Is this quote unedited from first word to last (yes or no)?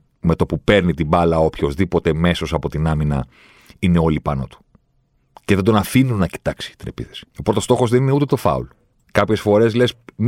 no